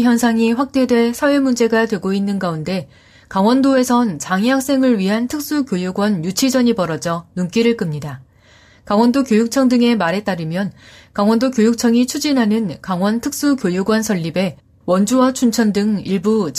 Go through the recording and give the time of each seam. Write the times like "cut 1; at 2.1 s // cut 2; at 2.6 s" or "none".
none